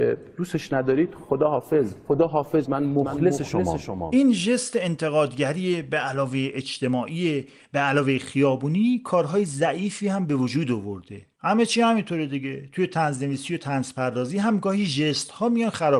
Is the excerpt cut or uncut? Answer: uncut